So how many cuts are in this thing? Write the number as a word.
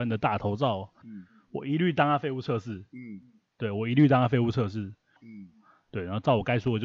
two